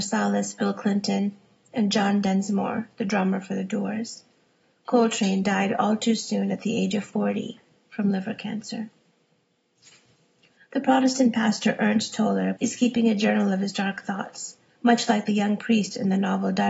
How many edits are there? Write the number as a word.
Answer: two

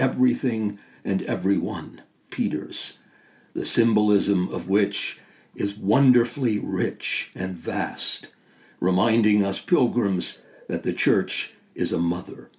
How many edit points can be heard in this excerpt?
one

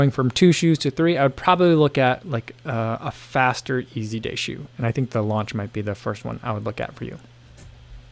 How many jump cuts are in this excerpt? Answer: zero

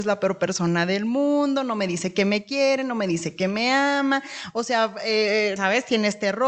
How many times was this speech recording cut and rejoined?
one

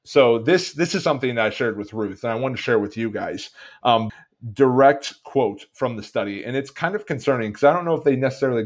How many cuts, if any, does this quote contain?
one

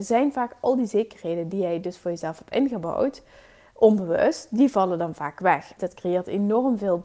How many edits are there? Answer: one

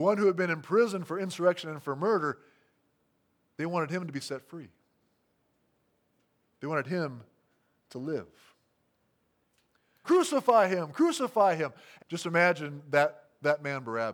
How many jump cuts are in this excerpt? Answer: two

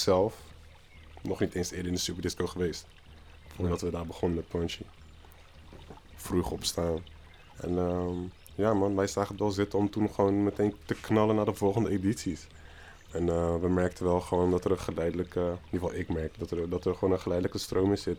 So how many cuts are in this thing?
one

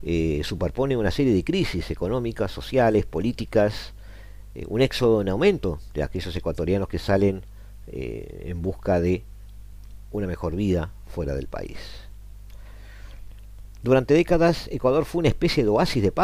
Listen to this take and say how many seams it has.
zero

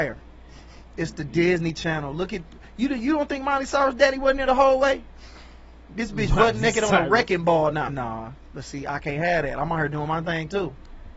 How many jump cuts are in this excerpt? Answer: two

